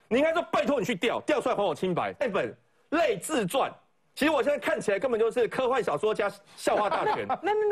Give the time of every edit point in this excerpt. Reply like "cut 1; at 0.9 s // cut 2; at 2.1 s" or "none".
none